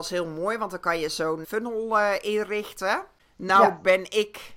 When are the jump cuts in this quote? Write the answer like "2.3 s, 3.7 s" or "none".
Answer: 1.4 s